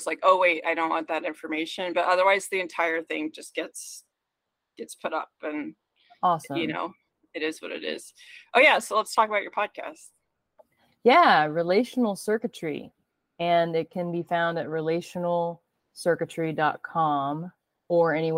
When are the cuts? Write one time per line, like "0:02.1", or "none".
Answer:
none